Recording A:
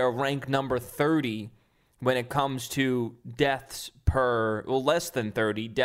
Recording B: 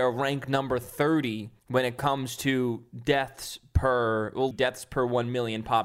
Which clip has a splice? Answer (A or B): B